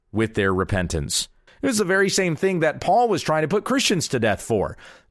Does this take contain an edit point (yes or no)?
yes